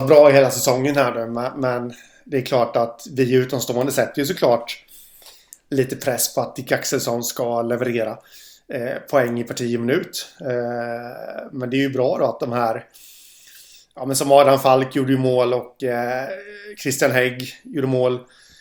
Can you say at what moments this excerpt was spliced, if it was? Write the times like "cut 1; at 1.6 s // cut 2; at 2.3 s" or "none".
none

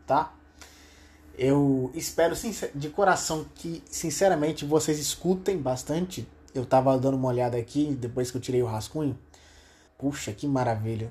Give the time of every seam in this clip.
cut 1; at 9.9 s

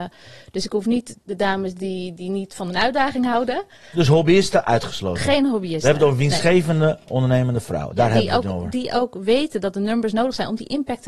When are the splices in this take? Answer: none

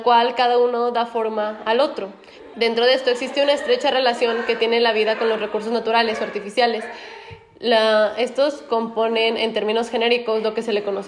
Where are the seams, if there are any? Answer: cut 1; at 2.5 s

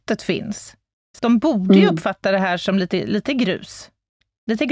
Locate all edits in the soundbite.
cut 1; at 1.2 s

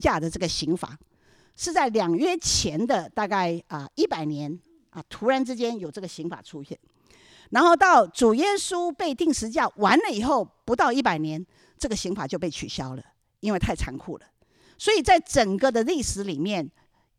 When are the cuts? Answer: none

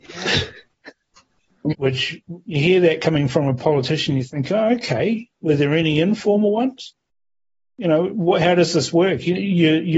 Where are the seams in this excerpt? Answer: cut 1; at 1.7 s

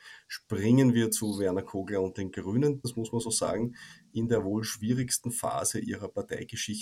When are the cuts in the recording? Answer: cut 1; at 2.8 s

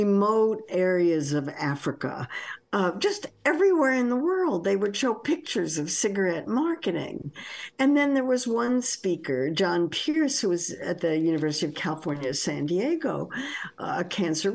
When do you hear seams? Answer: none

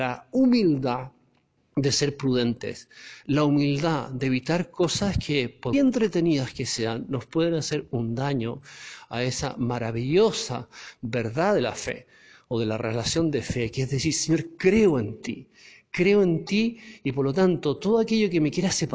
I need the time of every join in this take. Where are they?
cut 1; at 5.7 s

